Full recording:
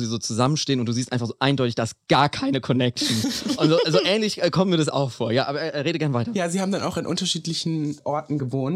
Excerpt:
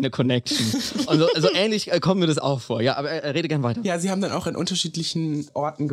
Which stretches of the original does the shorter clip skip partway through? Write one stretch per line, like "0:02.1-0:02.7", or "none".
none